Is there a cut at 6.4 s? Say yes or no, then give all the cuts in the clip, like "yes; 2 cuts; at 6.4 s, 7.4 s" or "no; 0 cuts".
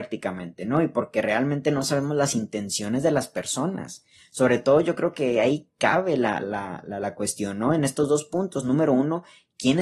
yes; 1 cut; at 6.4 s